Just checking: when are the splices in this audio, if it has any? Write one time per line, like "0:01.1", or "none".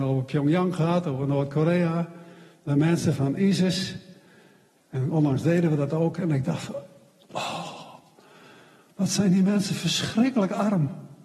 none